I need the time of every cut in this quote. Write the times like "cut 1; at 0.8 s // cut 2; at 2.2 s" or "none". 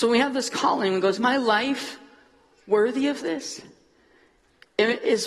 none